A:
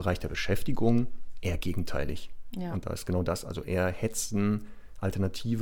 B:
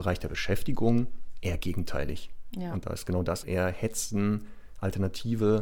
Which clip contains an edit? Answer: B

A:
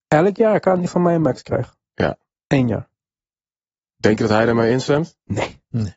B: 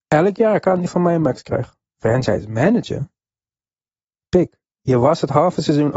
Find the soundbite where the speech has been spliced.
B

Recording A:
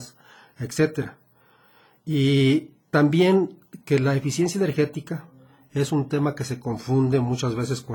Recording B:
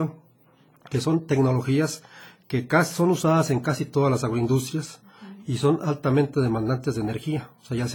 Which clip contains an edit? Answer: A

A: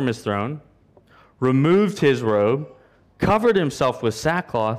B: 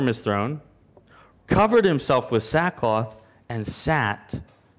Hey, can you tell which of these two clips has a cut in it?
B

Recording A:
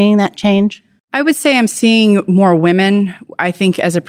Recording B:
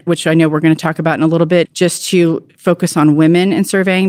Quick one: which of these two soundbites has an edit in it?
B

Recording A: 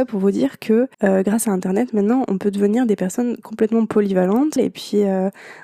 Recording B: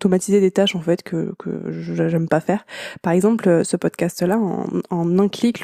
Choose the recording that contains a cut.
A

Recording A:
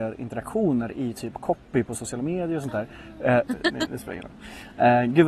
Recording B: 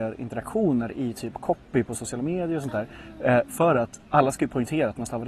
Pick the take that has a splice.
A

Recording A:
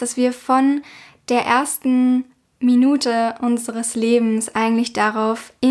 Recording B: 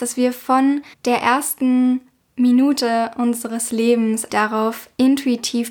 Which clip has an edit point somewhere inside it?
B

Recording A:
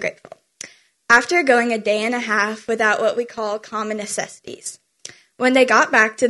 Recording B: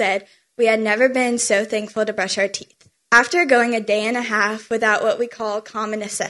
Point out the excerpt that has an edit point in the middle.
B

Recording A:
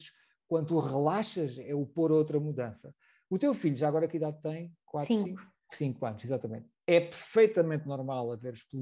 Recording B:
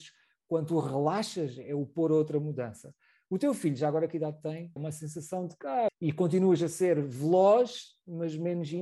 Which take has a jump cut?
B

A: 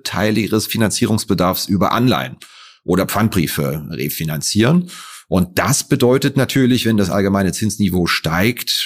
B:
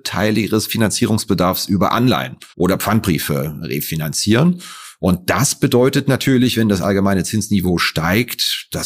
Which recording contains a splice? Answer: B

